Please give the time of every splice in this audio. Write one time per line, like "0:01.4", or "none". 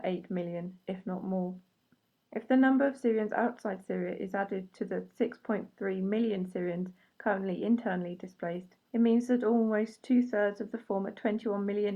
0:02.2
0:08.9